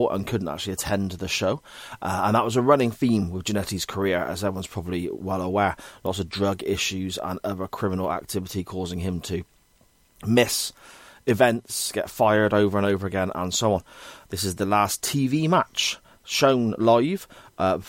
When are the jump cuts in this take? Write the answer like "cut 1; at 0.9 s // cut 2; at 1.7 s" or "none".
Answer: cut 1; at 14.3 s